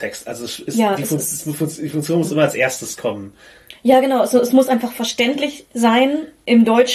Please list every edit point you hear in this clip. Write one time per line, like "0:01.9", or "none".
none